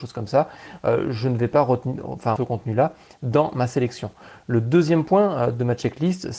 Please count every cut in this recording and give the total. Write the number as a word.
one